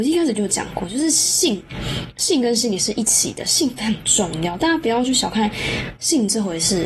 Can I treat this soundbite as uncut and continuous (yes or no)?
yes